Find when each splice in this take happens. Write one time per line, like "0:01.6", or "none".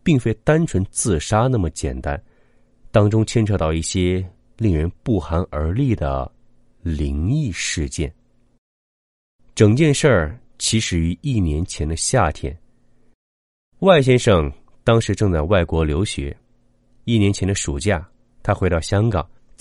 none